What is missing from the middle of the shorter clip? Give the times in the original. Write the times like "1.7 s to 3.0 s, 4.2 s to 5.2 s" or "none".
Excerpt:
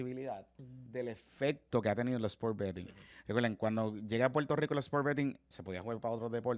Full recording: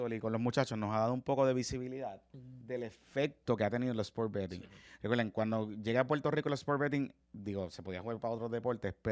7.3 s to 7.7 s